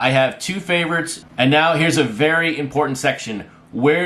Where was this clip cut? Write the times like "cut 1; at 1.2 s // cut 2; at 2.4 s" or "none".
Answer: cut 1; at 1.2 s